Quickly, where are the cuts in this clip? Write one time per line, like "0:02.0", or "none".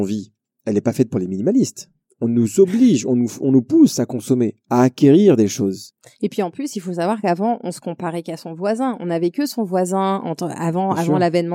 none